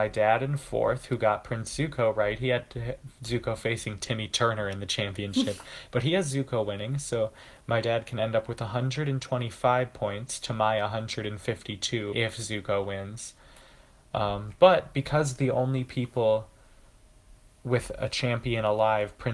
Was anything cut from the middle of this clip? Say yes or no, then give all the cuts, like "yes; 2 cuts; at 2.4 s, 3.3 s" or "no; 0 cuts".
yes; 1 cut; at 12.1 s